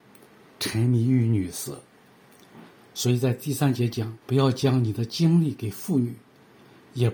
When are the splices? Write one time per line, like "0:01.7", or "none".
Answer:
0:02.8
0:04.2